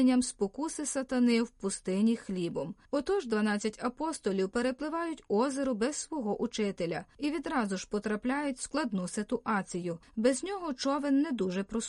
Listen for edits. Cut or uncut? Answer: uncut